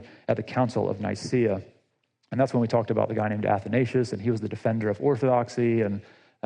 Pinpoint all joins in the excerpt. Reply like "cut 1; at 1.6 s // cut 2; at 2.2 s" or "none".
none